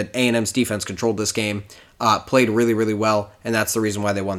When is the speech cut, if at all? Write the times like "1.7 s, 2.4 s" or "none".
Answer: none